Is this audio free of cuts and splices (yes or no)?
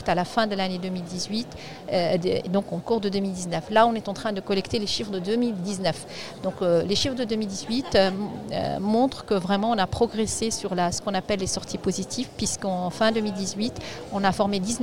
yes